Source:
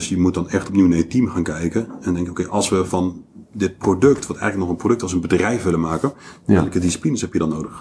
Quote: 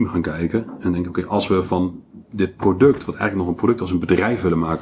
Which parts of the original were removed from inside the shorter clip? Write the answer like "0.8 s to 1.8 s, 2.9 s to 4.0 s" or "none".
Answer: none

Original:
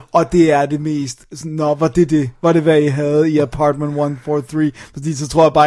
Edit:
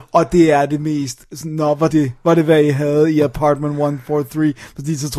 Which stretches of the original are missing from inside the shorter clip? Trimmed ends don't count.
1.9 s to 2.1 s

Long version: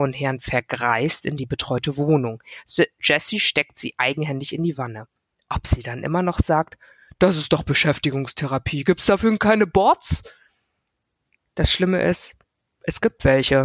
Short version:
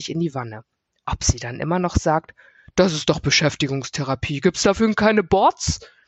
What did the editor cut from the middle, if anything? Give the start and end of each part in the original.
none

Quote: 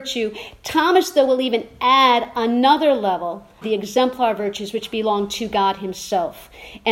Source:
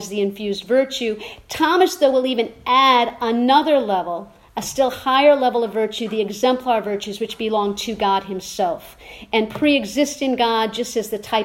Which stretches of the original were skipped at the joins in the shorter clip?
4.5 s to 6.1 s

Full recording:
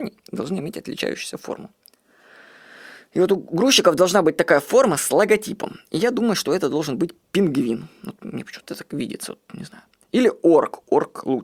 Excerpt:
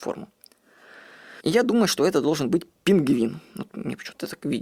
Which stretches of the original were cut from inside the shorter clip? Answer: 2.8 s to 5.9 s

